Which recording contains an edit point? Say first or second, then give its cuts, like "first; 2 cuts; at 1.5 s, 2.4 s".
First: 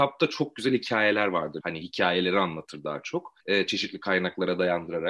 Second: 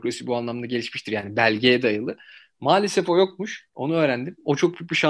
first; 2 cuts; at 1.6 s, 3.4 s